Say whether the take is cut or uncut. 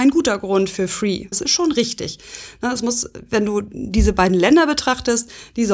cut